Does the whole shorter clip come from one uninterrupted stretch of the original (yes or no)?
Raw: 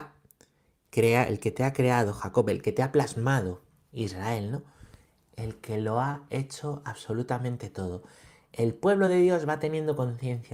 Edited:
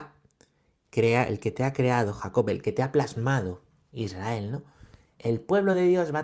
no